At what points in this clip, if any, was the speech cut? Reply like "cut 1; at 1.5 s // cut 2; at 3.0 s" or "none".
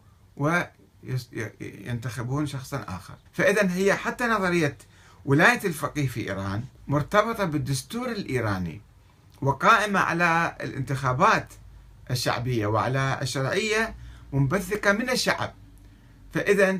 cut 1; at 3.3 s // cut 2; at 6.8 s

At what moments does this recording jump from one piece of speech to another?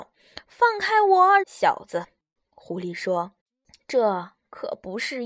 cut 1; at 1.4 s // cut 2; at 3.4 s

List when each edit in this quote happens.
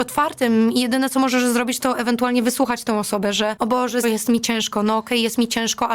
cut 1; at 4.0 s

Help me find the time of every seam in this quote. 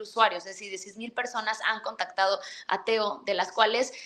none

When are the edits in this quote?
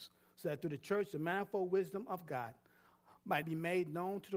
cut 1; at 3.4 s

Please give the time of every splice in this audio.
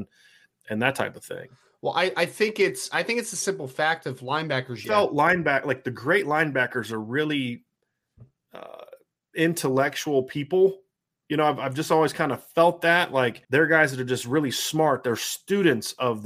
cut 1; at 4.8 s // cut 2; at 13.4 s

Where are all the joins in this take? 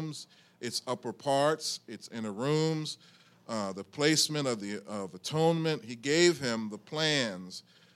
none

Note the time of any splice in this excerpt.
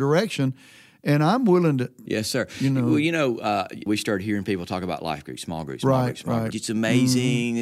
cut 1; at 2.1 s // cut 2; at 3.9 s // cut 3; at 6.5 s

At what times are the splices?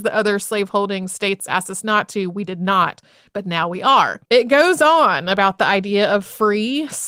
cut 1; at 4.2 s

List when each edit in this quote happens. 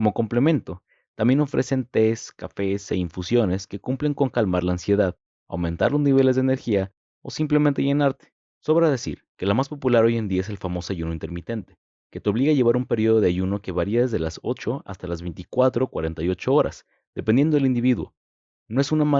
cut 1; at 8.5 s

